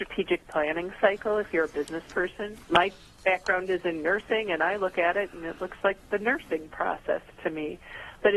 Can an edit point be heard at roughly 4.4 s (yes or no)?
no